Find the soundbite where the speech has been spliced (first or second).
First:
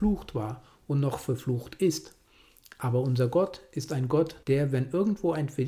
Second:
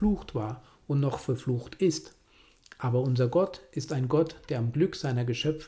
first